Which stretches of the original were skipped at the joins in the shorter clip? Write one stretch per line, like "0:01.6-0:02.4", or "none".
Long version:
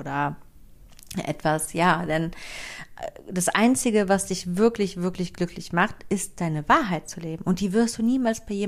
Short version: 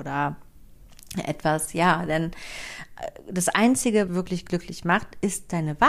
0:04.1-0:05.0

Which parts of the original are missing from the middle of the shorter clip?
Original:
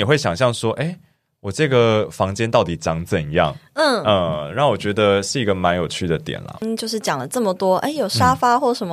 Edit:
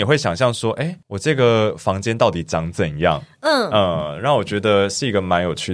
0:01.0-0:01.4

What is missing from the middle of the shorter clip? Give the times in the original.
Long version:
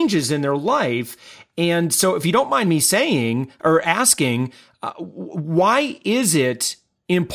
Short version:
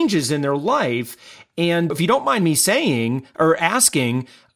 0:01.9-0:02.2

